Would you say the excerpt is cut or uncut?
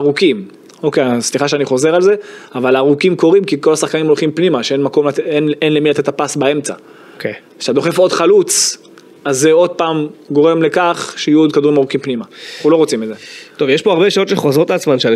uncut